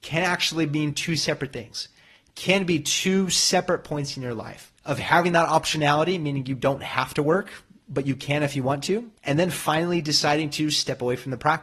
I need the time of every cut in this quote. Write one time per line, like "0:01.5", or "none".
0:04.8
0:09.2